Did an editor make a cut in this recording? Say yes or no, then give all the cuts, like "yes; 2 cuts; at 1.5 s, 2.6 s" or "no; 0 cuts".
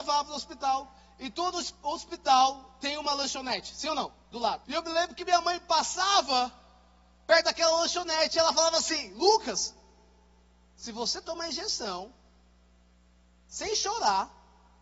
yes; 1 cut; at 4.6 s